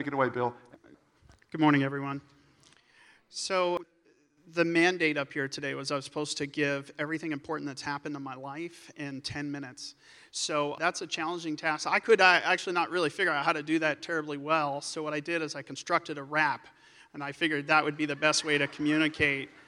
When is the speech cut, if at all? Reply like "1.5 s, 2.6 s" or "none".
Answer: none